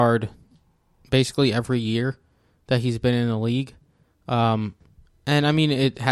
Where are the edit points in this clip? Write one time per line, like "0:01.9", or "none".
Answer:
none